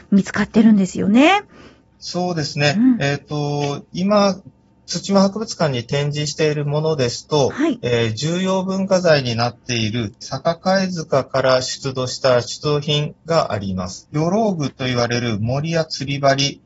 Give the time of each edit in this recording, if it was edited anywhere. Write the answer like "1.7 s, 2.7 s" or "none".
10.2 s, 14.1 s